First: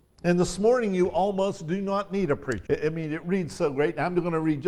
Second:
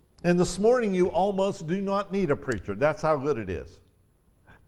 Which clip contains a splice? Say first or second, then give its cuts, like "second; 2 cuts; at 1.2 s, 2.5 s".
first; 1 cut; at 2.7 s